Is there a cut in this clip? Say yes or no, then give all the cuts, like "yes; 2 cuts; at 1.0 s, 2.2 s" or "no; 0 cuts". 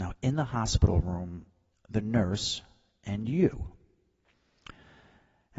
yes; 1 cut; at 1.7 s